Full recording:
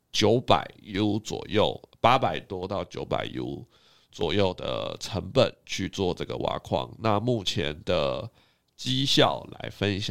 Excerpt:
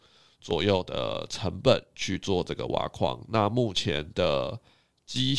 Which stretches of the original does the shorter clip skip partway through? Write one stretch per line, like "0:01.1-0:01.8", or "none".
none